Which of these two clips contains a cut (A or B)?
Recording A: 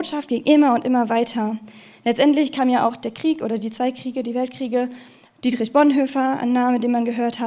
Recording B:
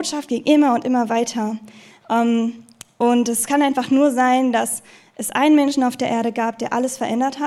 B